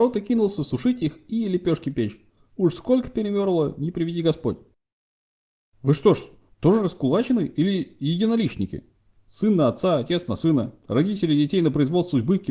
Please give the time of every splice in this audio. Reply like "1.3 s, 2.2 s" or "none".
2.4 s, 9.2 s